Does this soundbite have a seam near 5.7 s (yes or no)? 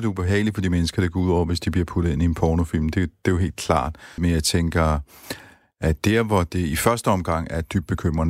no